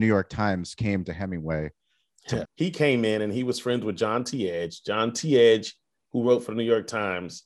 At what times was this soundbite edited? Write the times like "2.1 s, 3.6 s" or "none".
2.4 s